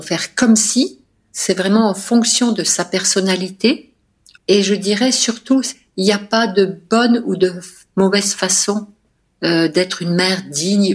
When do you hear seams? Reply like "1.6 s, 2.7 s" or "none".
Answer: 4.4 s